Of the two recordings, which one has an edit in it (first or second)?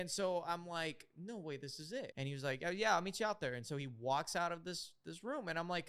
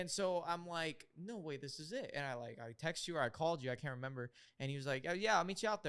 first